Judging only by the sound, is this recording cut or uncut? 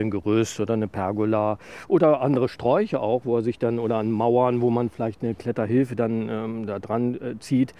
uncut